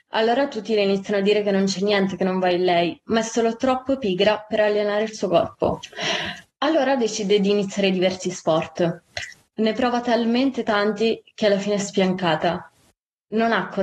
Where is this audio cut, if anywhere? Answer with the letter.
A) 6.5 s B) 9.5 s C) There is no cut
B